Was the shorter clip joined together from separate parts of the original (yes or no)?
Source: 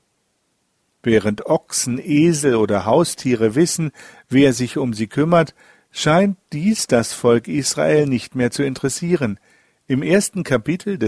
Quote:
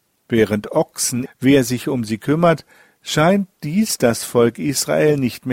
yes